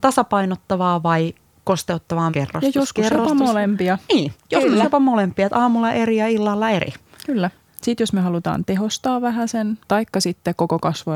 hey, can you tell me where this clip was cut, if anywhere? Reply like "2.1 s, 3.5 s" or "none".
2.3 s, 9.8 s